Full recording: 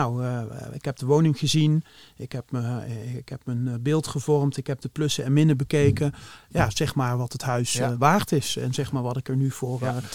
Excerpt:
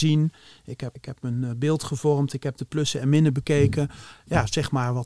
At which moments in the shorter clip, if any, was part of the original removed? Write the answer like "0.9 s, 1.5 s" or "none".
1.0 s